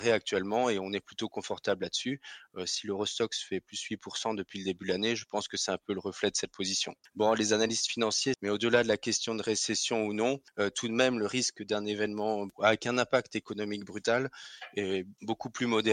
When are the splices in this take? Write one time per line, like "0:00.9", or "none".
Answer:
0:07.0
0:08.3